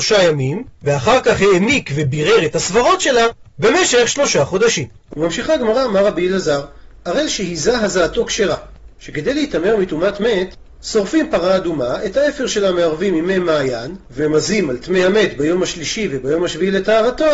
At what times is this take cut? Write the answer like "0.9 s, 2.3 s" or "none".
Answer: 14.1 s